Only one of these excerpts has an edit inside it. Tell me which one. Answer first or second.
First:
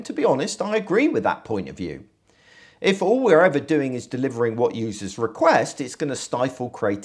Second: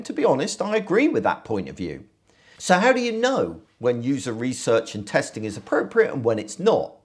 second